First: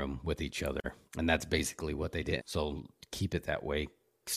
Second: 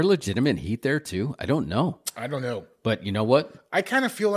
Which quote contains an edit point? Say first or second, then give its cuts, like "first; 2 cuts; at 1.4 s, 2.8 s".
first; 2 cuts; at 1.1 s, 2.4 s